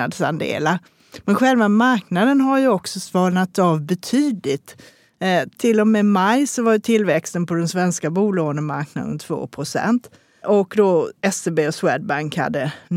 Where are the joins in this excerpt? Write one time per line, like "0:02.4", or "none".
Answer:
0:10.4